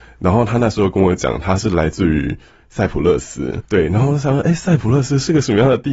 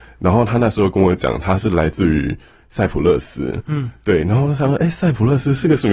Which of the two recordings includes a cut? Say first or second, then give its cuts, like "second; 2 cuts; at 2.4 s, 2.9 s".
first; 1 cut; at 3.7 s